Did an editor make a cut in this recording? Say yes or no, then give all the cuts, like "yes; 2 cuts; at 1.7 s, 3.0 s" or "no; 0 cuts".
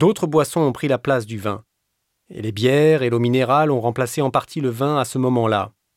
no; 0 cuts